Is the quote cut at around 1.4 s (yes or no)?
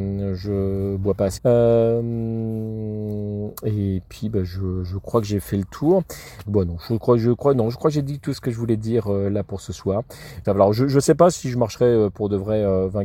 yes